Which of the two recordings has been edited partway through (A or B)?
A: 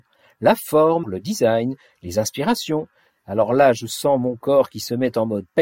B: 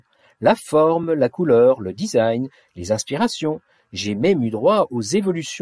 A